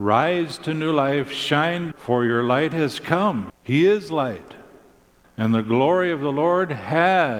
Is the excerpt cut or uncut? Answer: cut